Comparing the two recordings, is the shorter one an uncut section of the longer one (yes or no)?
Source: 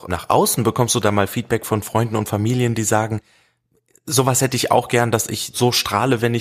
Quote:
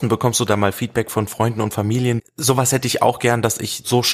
no